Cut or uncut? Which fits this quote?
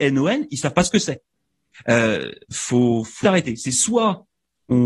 cut